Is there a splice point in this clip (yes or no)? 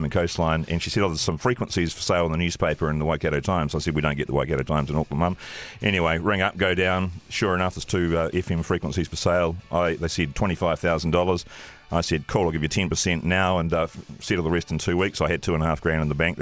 no